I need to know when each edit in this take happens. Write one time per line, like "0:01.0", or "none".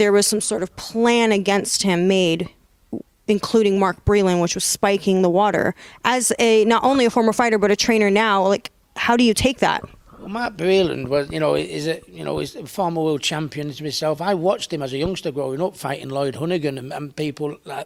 none